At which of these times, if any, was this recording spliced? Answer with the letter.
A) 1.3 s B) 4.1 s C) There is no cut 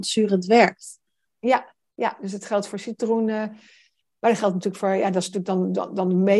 A